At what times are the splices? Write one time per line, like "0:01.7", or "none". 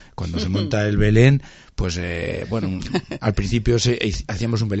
none